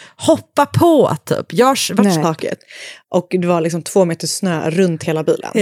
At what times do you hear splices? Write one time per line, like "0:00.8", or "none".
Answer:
0:02.2

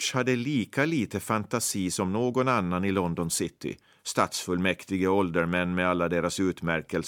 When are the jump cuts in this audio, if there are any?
none

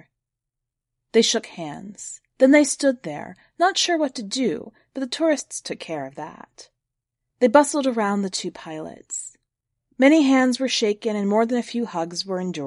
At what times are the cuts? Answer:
0:02.3

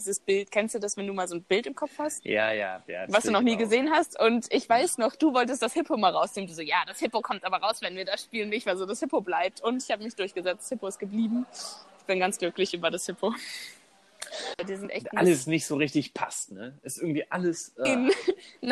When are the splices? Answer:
0:14.5

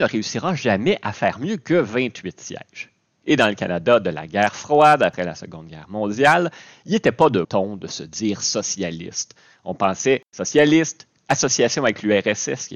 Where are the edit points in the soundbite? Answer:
0:07.4
0:11.2

